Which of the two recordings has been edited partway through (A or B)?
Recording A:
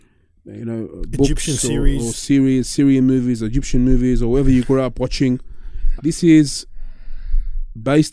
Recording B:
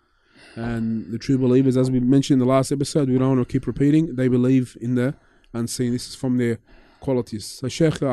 A